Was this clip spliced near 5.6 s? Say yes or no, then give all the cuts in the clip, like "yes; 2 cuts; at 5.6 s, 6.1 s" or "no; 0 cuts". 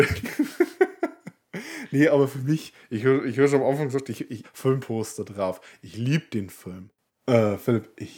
no; 2 cuts; at 4.4 s, 7.1 s